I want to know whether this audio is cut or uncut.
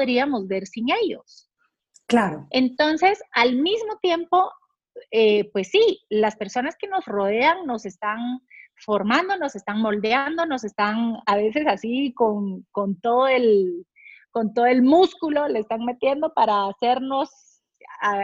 uncut